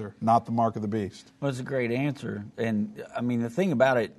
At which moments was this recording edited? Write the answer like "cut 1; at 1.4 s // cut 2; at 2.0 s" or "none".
none